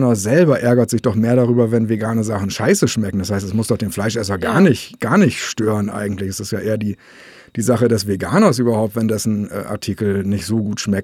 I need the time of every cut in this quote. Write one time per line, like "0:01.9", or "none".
none